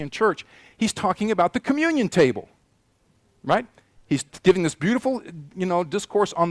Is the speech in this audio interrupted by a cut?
no; 0 cuts

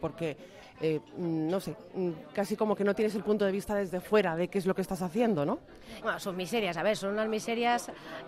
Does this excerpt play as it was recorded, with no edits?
no; 1 cut; at 6.0 s

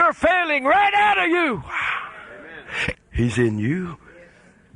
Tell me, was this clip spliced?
yes; 1 cut; at 2.9 s

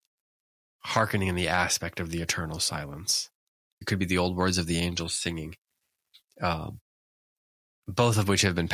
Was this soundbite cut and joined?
yes; 1 cut; at 3.8 s

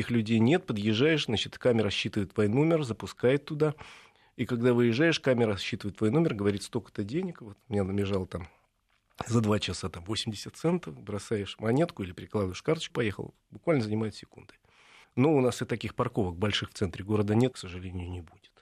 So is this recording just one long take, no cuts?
no; 3 cuts; at 12.9 s, 15.0 s, 17.5 s

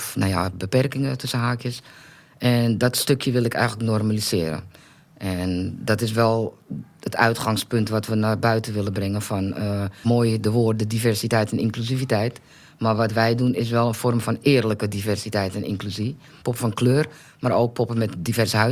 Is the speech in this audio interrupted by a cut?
yes; 2 cuts; at 10.0 s, 16.4 s

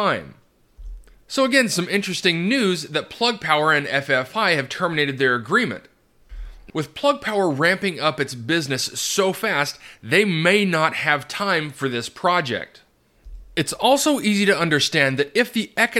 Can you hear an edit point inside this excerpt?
yes; 1 cut; at 6.7 s

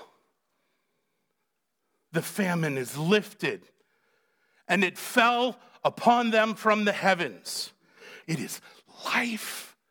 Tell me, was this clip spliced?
yes; 2 cuts; at 2.1 s, 8.2 s

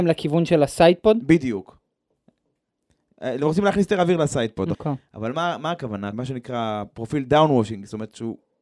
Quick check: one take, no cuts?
no; 2 cuts; at 4.7 s, 6.1 s

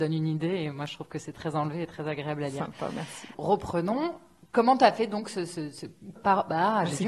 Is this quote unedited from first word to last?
no; 1 cut; at 6.2 s

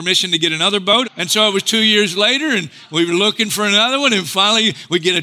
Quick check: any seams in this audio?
yes; 1 cut; at 1.0 s

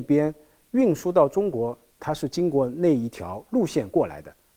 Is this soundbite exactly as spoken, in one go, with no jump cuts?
no; 1 cut; at 2.0 s

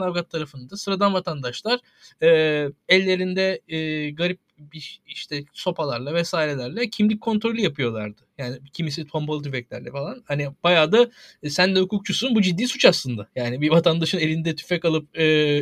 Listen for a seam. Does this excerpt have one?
no; 0 cuts

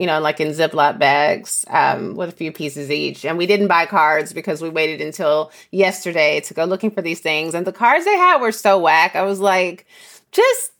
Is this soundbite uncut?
yes; 0 cuts

